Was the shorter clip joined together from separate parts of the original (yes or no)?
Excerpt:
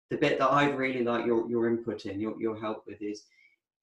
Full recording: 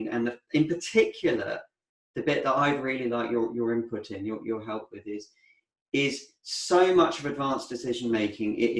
no